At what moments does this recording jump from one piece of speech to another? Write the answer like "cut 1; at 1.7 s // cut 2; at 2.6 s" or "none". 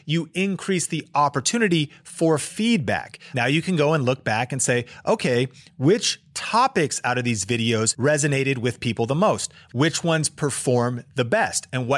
cut 1; at 3.3 s // cut 2; at 9.7 s